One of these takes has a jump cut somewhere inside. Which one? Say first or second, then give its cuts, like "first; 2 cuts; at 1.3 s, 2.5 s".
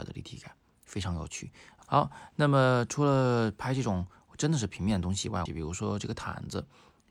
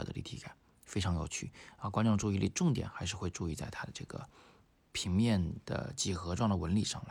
first; 2 cuts; at 1.8 s, 5.5 s